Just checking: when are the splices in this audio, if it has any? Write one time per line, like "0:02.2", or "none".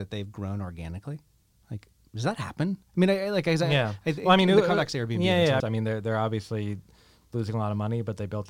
0:05.6